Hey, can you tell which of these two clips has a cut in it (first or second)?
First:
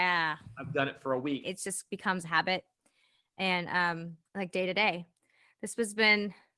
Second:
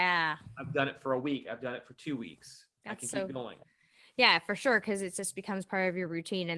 first